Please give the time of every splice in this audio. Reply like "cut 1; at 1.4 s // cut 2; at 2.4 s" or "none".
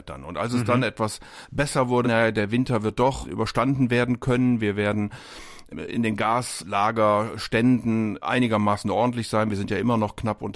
cut 1; at 2.0 s